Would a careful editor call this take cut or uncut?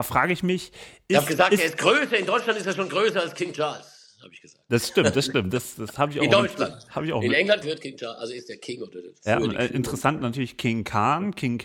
cut